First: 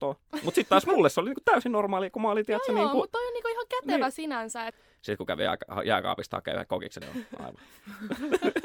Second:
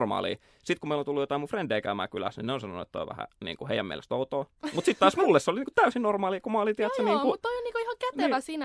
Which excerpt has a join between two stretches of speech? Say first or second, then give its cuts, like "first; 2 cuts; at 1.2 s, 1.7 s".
first; 2 cuts; at 4.7 s, 7.0 s